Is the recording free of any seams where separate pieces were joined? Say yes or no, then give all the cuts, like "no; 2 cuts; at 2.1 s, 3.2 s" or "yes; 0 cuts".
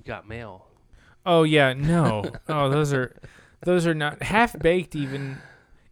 yes; 0 cuts